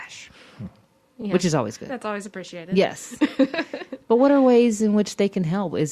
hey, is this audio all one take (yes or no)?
yes